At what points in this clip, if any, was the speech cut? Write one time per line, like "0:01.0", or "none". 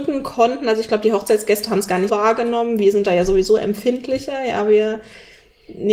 0:02.1